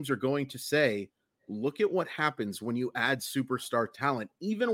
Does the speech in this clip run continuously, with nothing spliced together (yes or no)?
yes